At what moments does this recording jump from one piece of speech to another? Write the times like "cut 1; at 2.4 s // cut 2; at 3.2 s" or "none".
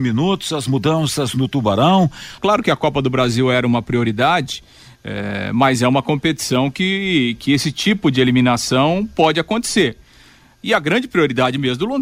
cut 1; at 2.4 s